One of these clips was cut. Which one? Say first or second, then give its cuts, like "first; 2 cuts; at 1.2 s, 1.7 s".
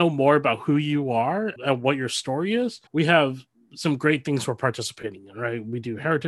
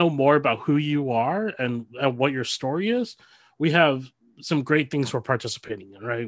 first; 2 cuts; at 1.6 s, 2.9 s